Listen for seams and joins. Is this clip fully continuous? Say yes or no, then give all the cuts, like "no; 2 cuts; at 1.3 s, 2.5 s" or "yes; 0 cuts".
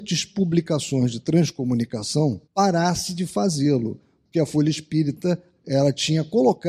no; 2 cuts; at 2.5 s, 5.6 s